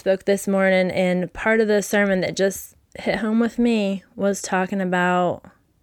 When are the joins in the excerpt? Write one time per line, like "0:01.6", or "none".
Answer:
none